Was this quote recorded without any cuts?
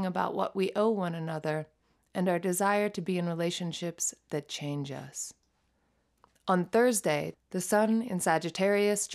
no; 1 cut; at 7.3 s

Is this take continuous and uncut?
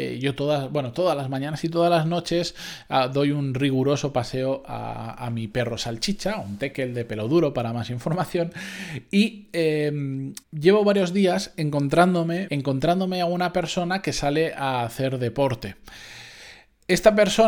no; 2 cuts; at 10.4 s, 12.5 s

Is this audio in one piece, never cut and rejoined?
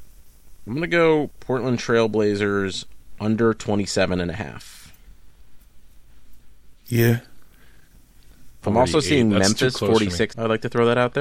no; 3 cuts; at 6.8 s, 8.6 s, 10.3 s

